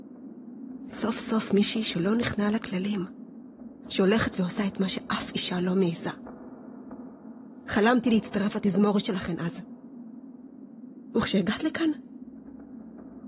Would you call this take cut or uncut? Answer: cut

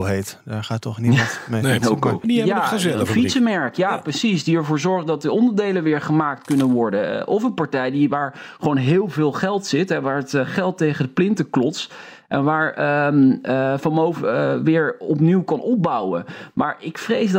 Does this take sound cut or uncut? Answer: cut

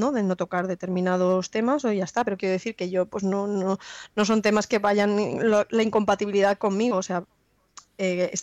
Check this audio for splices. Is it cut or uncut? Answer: uncut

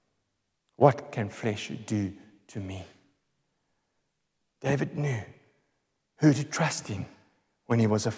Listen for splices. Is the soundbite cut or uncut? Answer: uncut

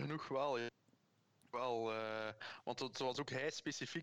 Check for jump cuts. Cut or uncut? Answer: uncut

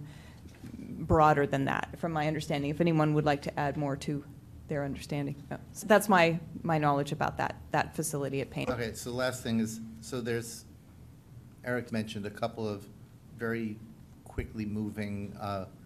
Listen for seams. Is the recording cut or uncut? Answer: cut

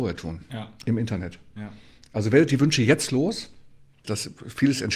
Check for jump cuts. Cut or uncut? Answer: cut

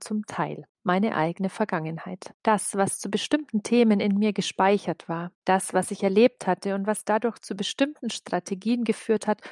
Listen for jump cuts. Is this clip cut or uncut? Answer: uncut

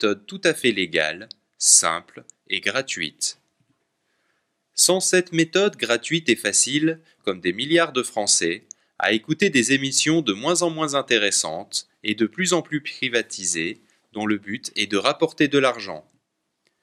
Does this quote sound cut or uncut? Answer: cut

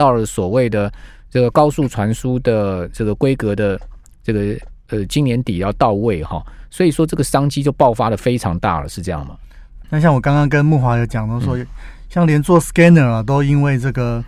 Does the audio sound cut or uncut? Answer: cut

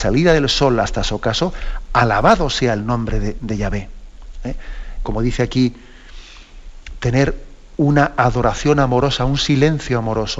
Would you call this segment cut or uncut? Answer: cut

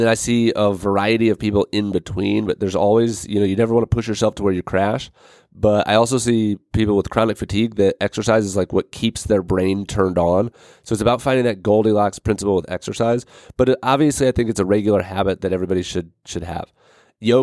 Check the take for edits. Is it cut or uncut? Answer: uncut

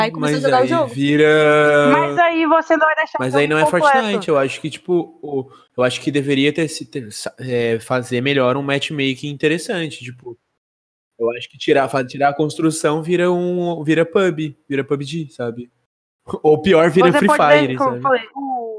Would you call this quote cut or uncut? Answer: uncut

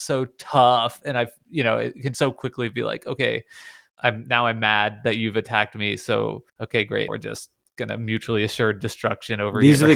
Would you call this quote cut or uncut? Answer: cut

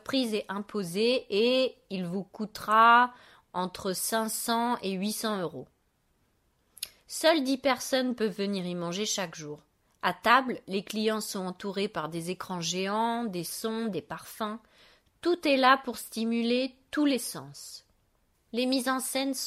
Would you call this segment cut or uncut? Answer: uncut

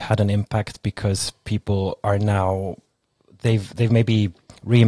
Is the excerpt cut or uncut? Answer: uncut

